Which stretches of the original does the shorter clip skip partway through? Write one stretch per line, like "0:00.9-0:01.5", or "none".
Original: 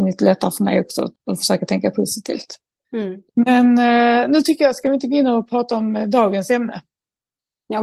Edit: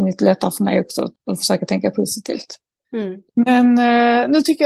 none